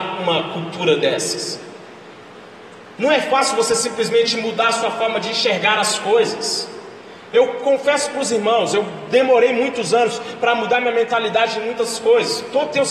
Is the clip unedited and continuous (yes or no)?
yes